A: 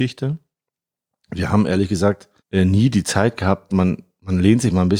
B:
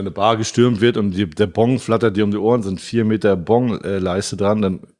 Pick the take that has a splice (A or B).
A